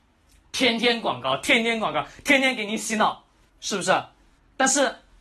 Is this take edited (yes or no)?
no